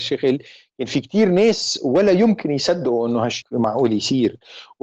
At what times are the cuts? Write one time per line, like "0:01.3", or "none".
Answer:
0:03.4